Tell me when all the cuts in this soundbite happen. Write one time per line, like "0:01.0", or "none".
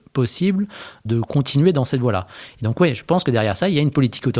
none

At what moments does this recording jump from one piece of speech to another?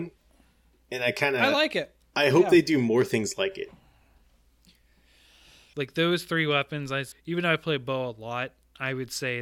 0:05.7
0:07.1

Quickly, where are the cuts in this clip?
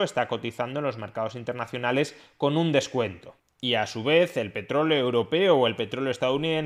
none

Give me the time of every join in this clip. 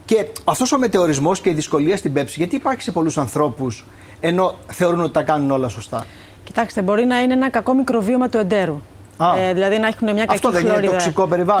none

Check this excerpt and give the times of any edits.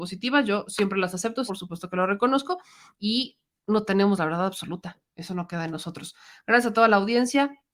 0:01.5

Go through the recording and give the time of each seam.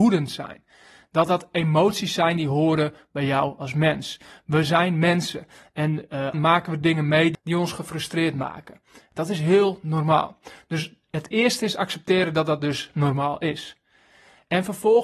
0:06.3

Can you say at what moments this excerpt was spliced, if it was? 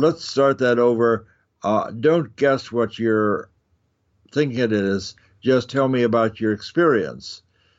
none

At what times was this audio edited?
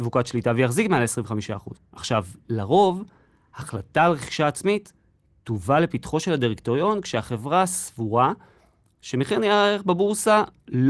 0:01.8

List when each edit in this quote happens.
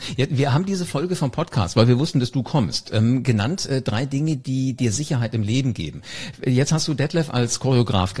none

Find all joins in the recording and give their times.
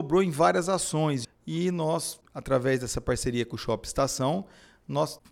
0:01.2

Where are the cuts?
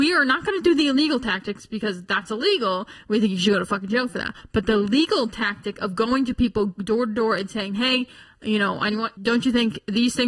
0:09.2

